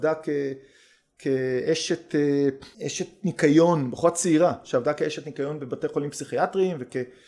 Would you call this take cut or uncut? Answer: cut